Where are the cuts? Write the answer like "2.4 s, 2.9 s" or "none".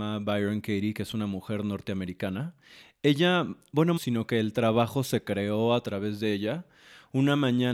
4.0 s